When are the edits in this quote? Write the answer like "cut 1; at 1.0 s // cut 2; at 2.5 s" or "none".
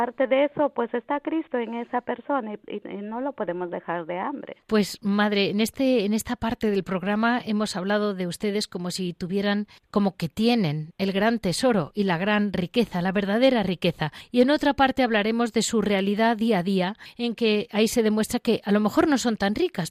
cut 1; at 4.6 s

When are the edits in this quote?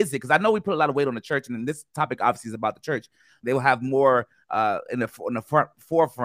cut 1; at 3.4 s // cut 2; at 4.9 s

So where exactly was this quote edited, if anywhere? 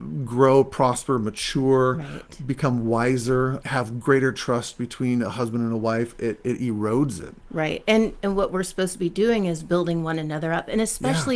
cut 1; at 3.6 s

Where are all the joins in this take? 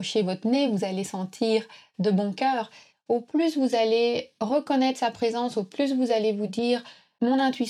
cut 1; at 2.9 s

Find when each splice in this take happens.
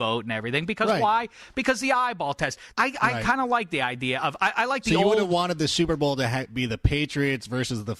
cut 1; at 2.7 s

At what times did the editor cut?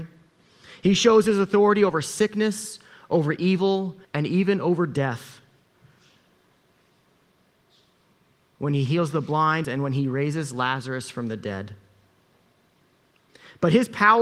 cut 1; at 4.0 s // cut 2; at 9.6 s

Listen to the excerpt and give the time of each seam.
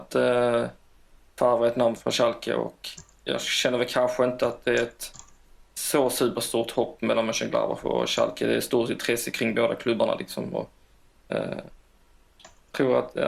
cut 1; at 2.0 s

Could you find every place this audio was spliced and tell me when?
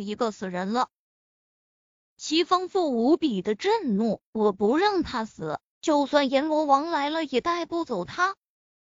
cut 1; at 4.3 s

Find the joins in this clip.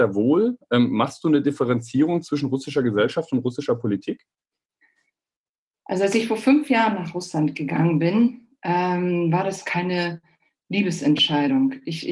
none

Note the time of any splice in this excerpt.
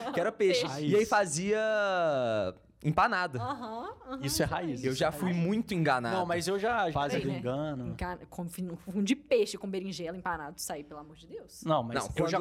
cut 1; at 6.9 s

